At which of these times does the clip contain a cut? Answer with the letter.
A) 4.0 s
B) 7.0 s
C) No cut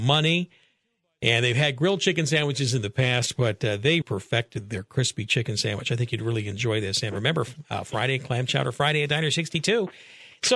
A